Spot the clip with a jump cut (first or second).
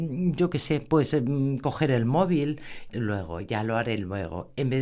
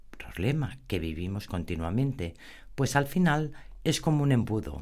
first